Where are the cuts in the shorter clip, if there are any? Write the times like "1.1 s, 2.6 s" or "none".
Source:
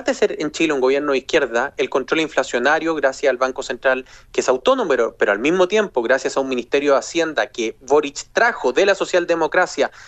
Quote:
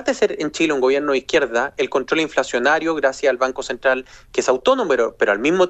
none